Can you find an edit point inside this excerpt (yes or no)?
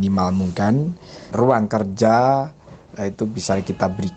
yes